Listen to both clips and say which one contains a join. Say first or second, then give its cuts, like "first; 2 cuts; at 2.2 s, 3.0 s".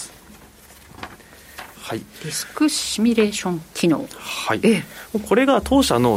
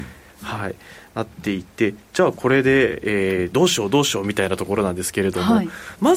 first; 1 cut; at 1.8 s